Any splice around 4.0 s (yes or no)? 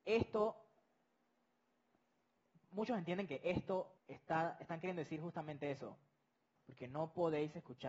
yes